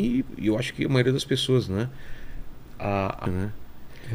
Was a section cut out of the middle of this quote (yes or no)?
yes